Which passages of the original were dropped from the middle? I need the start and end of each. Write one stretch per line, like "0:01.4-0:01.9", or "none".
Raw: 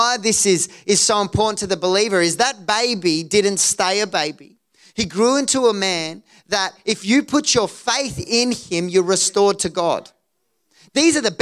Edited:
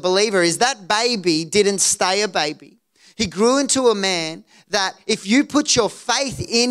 none